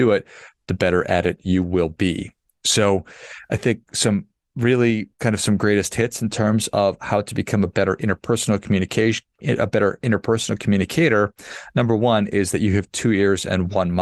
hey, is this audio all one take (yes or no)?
no